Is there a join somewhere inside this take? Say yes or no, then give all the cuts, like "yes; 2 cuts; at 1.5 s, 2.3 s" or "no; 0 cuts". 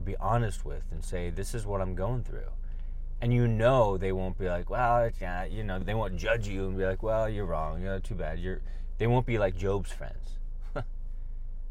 yes; 1 cut; at 5.8 s